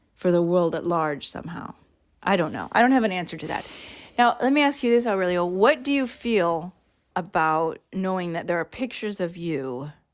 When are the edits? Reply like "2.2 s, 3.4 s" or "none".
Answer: none